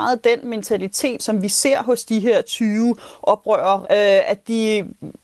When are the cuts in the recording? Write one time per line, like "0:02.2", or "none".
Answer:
0:01.2
0:03.8